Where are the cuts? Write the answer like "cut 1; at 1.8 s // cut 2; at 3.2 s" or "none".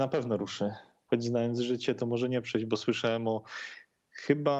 cut 1; at 1.1 s